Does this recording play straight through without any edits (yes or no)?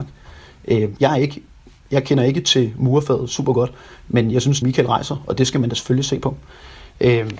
no